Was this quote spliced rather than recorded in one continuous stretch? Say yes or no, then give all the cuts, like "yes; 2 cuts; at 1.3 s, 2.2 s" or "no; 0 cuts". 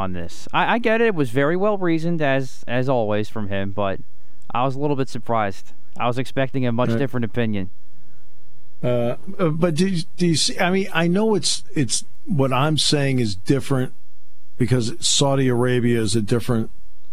no; 0 cuts